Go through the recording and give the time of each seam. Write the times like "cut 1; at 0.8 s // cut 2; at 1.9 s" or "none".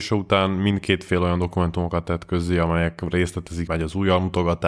cut 1; at 3.7 s